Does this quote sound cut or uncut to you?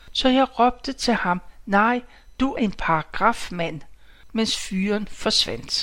cut